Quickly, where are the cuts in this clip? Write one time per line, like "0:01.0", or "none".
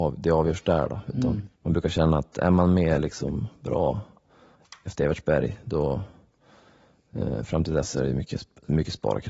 0:01.5